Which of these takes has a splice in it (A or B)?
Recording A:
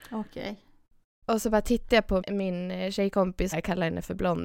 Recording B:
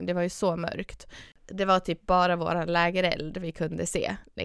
A